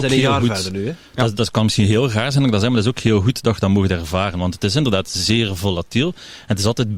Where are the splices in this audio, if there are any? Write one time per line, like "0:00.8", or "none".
none